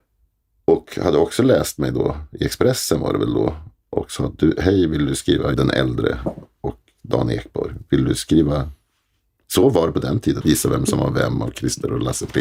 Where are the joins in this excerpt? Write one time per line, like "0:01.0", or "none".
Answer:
0:05.5
0:10.4